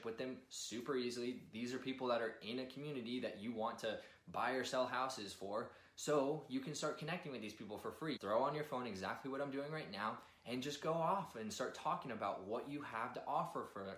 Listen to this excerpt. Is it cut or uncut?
cut